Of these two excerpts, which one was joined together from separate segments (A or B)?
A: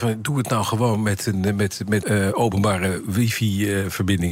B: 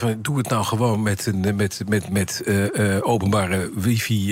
A